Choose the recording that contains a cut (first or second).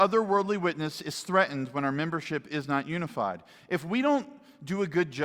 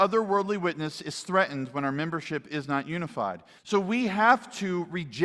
second